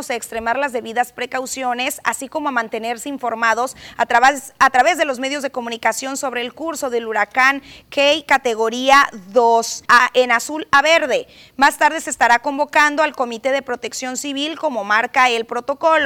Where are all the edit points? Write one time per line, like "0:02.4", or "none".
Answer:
0:09.8